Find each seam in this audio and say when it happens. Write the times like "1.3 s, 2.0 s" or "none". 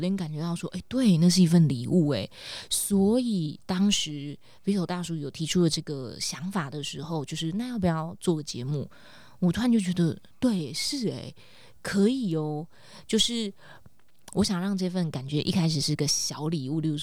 none